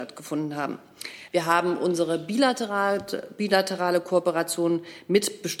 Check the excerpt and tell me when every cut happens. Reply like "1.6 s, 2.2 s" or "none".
1.3 s